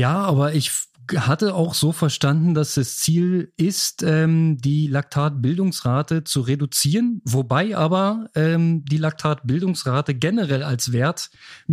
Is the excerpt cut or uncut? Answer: uncut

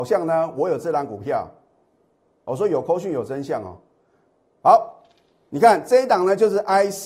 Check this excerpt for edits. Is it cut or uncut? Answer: uncut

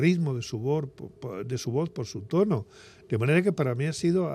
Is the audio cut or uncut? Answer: uncut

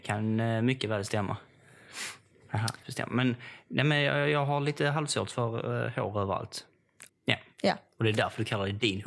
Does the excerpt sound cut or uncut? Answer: cut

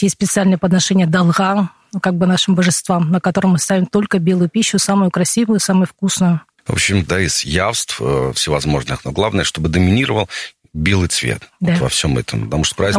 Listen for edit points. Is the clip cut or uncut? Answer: cut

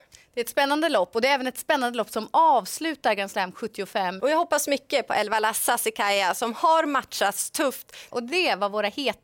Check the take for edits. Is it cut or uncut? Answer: cut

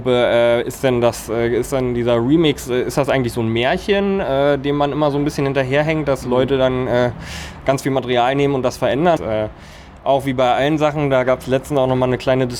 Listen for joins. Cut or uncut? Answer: cut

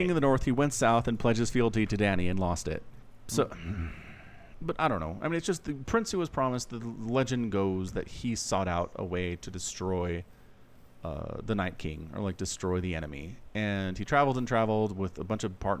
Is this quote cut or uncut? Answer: uncut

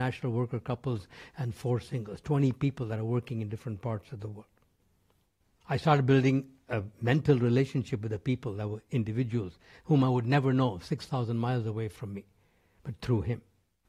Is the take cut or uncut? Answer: cut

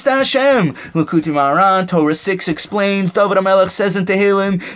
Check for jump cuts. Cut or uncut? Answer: uncut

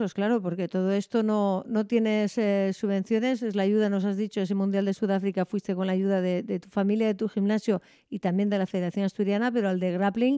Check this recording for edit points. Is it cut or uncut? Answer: uncut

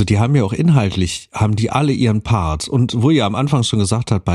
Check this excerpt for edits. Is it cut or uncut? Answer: uncut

